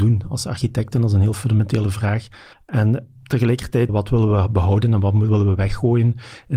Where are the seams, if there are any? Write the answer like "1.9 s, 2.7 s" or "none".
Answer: 2.5 s, 3.9 s